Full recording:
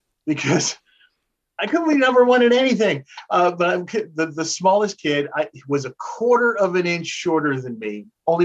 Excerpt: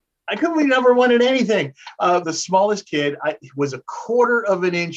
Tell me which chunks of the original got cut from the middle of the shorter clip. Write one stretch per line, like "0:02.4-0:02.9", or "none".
0:03.5-0:04.3